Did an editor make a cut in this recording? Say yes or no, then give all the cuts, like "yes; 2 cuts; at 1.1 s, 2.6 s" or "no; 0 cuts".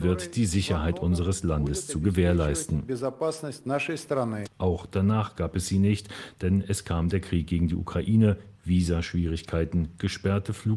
yes; 1 cut; at 4.4 s